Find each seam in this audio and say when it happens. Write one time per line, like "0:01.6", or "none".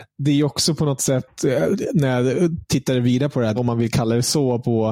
0:03.6